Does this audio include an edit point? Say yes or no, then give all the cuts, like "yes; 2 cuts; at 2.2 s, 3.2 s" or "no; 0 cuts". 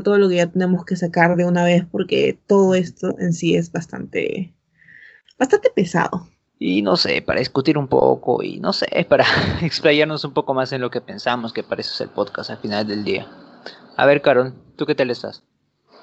yes; 1 cut; at 6.5 s